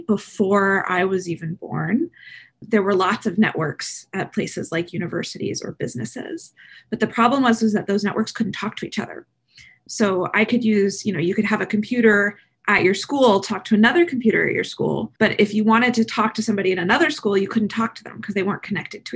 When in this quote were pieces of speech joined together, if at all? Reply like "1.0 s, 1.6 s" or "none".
15.2 s